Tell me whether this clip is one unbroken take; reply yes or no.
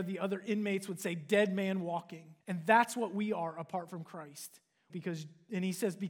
no